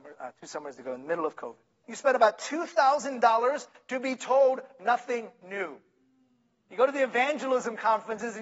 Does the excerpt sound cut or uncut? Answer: cut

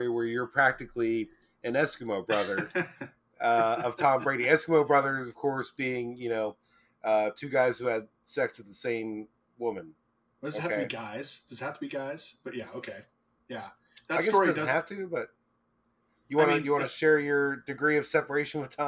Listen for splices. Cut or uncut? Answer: uncut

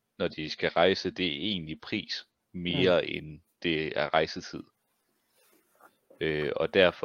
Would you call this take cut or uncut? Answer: uncut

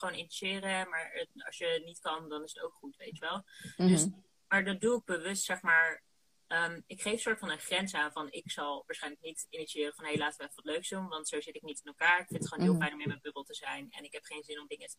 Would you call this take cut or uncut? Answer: uncut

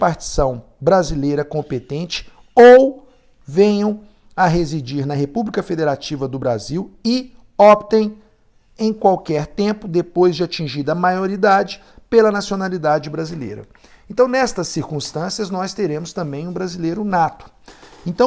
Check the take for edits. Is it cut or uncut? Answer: uncut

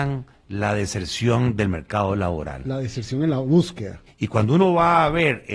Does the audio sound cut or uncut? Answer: cut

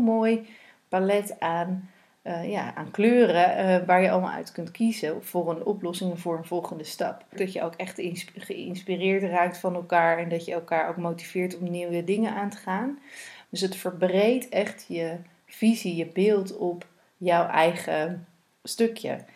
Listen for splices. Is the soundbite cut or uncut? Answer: cut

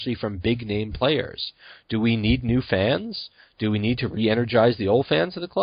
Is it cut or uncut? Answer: uncut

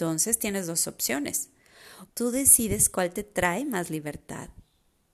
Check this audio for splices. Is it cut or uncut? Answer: cut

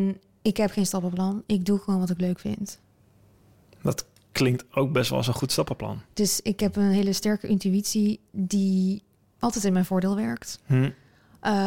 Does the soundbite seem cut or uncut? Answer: uncut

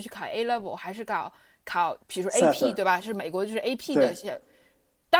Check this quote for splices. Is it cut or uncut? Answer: uncut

